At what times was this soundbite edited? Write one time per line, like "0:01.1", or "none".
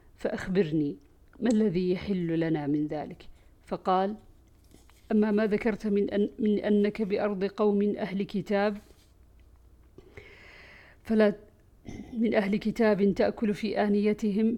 none